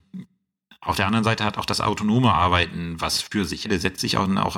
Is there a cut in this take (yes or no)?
yes